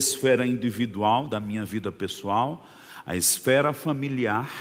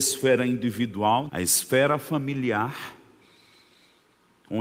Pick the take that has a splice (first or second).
second